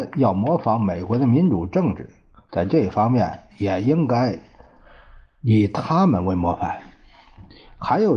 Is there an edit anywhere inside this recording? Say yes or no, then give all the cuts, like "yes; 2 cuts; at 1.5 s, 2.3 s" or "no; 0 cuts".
no; 0 cuts